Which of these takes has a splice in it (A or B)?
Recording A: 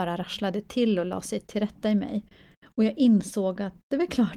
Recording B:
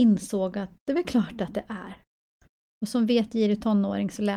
B